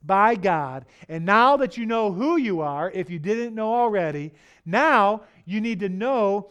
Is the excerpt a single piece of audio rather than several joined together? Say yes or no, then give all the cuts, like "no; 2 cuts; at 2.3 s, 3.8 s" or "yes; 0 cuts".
yes; 0 cuts